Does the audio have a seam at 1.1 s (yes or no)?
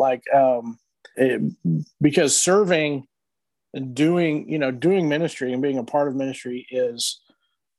yes